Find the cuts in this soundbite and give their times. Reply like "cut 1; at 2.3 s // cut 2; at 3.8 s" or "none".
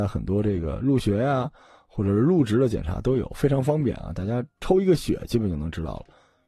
none